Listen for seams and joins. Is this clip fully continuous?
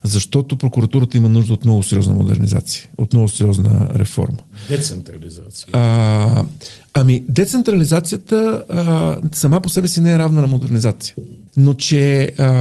no; 1 cut; at 11.5 s

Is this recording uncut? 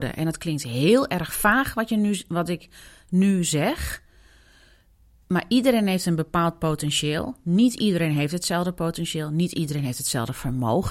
yes; 0 cuts

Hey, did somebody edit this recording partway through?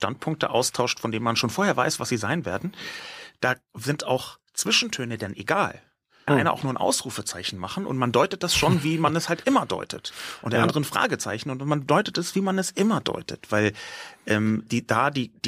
yes; 1 cut; at 6.3 s

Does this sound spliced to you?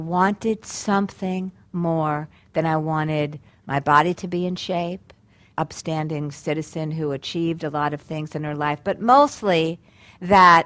yes; 1 cut; at 5.5 s

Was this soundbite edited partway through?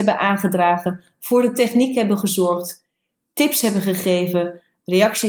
no; 0 cuts

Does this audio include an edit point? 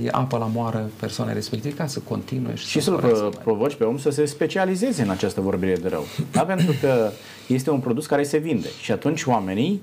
no; 0 cuts

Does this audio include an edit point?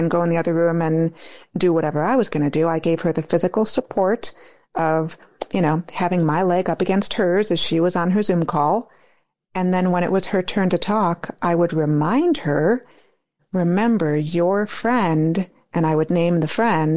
yes; 1 cut; at 13.4 s

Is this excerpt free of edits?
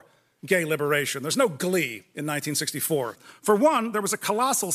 no; 1 cut; at 3.1 s

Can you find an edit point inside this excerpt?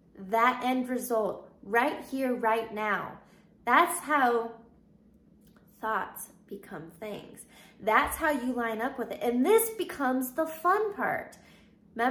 no; 0 cuts

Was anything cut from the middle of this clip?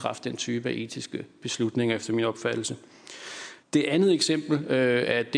yes; 1 cut; at 3.6 s

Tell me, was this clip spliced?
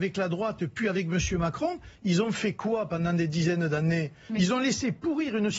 no; 0 cuts

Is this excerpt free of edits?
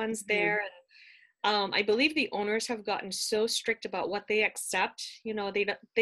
yes; 0 cuts

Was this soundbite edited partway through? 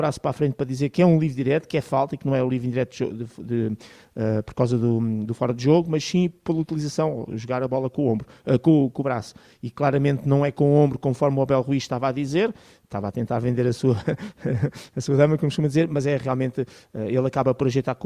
no; 0 cuts

